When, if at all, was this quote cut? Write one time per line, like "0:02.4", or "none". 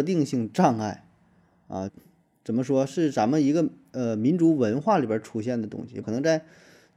0:01.9
0:06.0